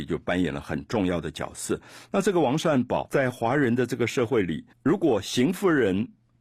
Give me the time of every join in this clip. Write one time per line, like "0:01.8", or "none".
0:03.1
0:04.7